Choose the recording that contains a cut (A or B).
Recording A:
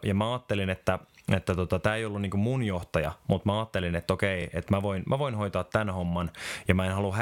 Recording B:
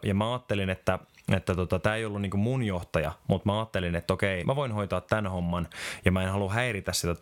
B